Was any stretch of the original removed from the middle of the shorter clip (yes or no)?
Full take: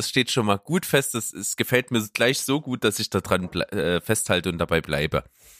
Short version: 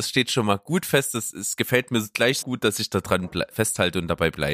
yes